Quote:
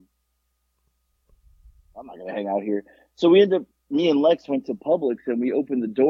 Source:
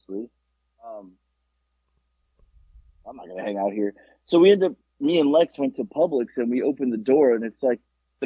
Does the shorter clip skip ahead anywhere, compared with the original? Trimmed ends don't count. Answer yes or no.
no